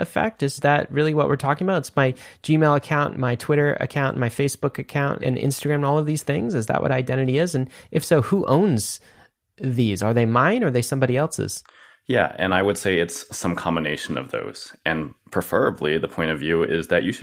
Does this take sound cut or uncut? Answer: uncut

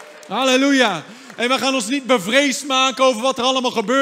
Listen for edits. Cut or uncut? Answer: uncut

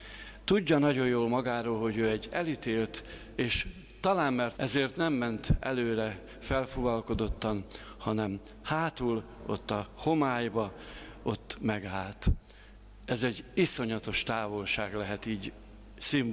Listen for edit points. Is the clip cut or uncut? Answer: cut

